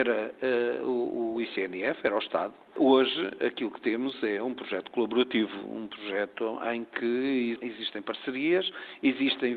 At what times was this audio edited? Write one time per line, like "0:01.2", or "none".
none